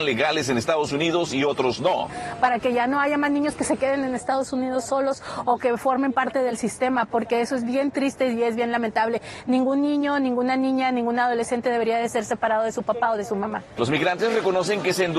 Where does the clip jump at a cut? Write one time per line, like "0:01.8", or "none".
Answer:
0:13.8